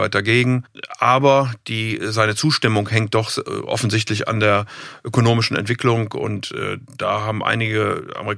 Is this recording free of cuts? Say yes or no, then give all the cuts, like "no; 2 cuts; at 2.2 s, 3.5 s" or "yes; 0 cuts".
yes; 0 cuts